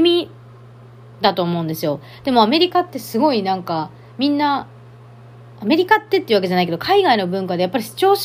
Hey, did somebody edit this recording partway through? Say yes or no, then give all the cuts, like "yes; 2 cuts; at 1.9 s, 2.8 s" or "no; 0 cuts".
no; 0 cuts